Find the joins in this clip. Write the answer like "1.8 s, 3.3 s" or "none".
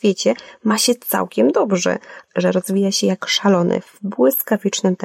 2.3 s